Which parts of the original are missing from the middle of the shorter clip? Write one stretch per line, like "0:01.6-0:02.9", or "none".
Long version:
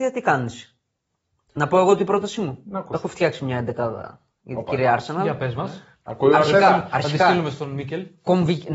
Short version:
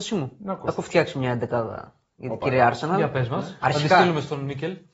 0:05.9-0:06.9